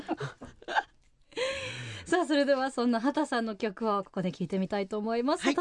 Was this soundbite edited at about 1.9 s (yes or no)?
no